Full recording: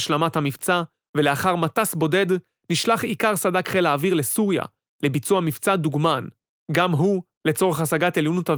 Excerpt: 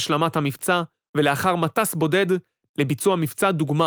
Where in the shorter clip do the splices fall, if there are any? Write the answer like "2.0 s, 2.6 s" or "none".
2.7 s